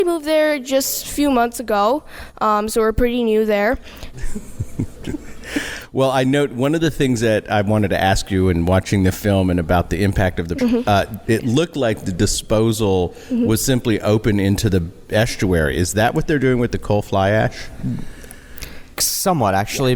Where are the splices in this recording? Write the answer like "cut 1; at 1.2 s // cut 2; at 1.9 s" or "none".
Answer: cut 1; at 4.1 s // cut 2; at 10.6 s